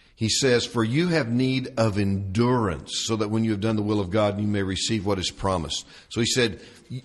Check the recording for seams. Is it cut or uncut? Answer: uncut